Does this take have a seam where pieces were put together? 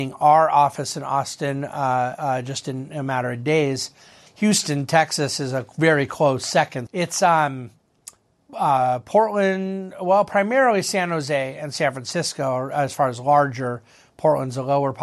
yes; 2 cuts; at 4.3 s, 6.9 s

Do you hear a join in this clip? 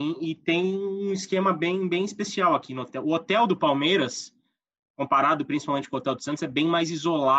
no; 0 cuts

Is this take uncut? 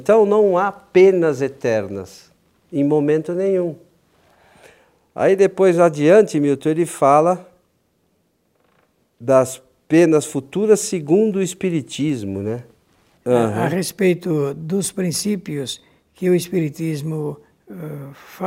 no; 1 cut; at 13.1 s

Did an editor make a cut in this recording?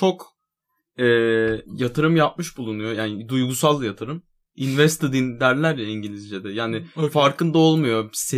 yes; 1 cut; at 1.6 s

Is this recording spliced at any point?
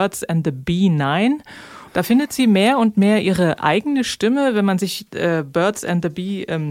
yes; 1 cut; at 1.9 s

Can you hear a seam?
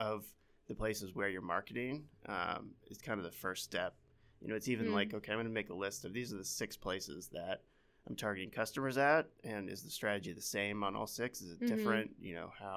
no; 0 cuts

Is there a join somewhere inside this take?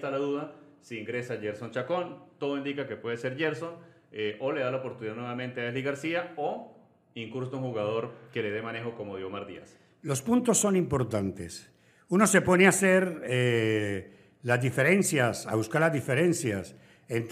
no; 0 cuts

